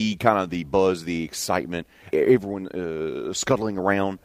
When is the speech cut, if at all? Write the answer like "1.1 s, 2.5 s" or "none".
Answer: 2.1 s